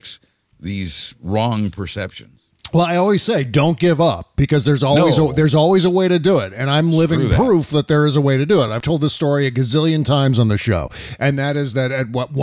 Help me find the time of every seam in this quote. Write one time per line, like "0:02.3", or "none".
none